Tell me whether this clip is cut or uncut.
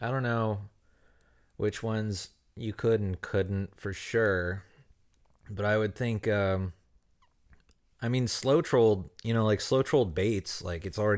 uncut